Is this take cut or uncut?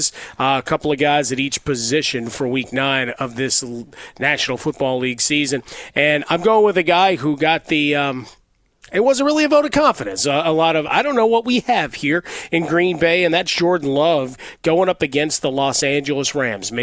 uncut